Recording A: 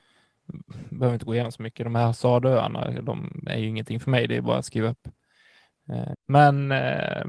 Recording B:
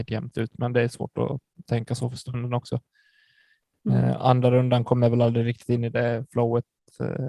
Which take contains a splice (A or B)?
A